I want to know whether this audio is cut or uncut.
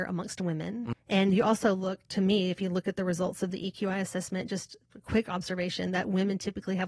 cut